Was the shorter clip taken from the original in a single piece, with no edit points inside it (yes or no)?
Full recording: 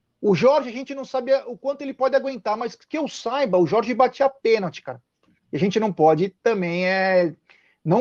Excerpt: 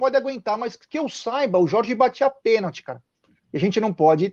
yes